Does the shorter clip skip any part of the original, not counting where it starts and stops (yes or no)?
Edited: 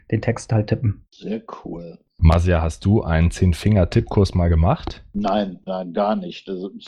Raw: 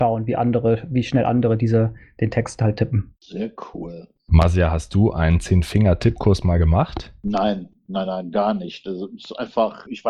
yes